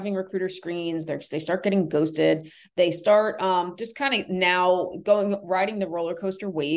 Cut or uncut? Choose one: uncut